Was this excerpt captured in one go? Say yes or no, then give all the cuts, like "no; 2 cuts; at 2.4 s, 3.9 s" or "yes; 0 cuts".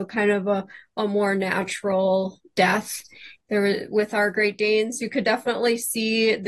no; 1 cut; at 3.4 s